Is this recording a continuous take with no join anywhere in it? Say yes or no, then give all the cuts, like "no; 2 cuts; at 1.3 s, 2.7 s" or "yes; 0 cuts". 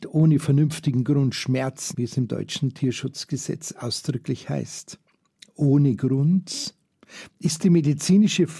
no; 2 cuts; at 1.9 s, 7.3 s